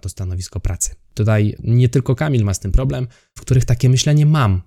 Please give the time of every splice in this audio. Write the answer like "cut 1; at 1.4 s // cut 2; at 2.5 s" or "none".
cut 1; at 1.1 s // cut 2; at 3.4 s